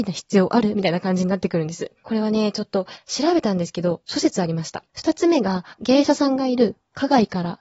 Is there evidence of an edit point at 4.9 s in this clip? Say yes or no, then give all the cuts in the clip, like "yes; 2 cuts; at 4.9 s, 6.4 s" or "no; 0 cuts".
yes; 2 cuts; at 2.0 s, 4.9 s